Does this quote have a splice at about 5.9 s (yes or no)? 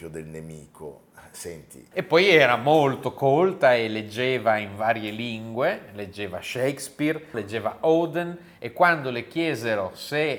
no